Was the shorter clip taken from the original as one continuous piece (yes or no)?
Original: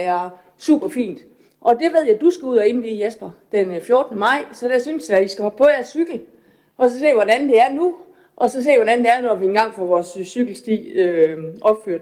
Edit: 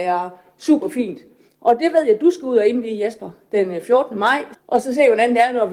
no